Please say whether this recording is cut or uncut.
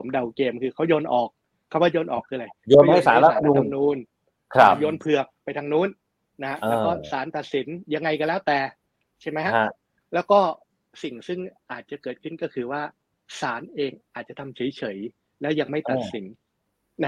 uncut